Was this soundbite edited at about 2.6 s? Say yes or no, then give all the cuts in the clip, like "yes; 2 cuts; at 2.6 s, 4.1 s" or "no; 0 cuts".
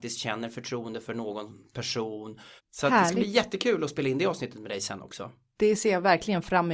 yes; 1 cut; at 2.6 s